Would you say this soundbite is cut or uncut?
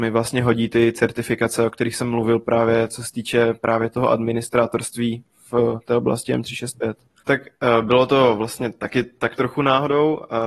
cut